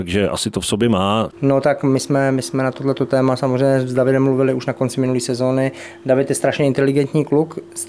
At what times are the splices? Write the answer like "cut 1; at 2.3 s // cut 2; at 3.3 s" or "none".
cut 1; at 1.3 s